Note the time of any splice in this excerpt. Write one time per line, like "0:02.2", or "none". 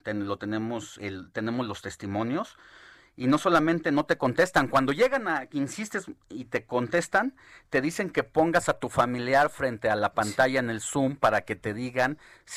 0:01.0